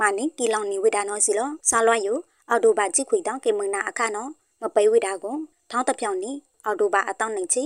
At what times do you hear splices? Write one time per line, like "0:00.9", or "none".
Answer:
0:01.6